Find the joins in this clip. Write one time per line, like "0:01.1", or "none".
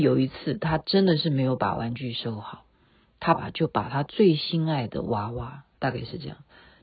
0:03.3
0:05.7